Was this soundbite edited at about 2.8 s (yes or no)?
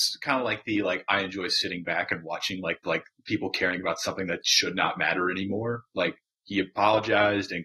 yes